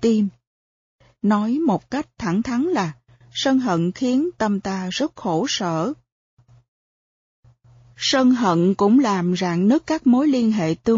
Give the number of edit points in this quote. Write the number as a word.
one